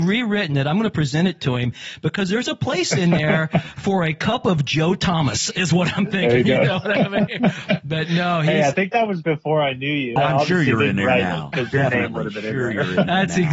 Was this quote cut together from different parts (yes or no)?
yes